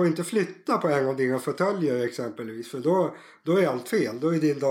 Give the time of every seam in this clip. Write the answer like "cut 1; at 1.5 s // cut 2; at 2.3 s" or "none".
none

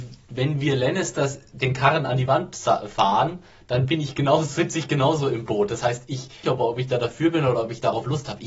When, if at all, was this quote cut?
cut 1; at 6.4 s

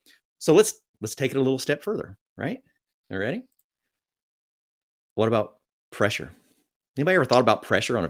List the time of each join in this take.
none

